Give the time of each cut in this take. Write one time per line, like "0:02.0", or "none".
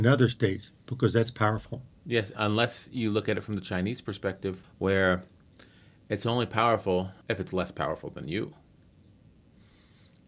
0:02.3
0:04.6
0:07.2